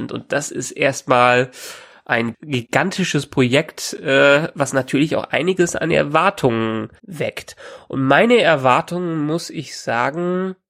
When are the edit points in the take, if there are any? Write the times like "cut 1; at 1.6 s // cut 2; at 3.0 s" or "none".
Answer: cut 1; at 7.0 s